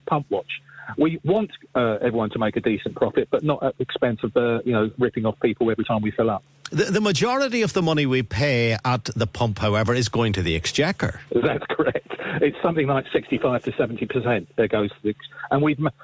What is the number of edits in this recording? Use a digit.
1